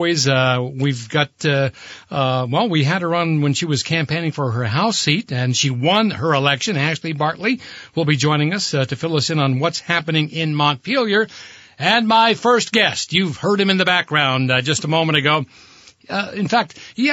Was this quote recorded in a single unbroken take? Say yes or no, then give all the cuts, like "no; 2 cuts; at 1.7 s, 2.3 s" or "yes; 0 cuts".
yes; 0 cuts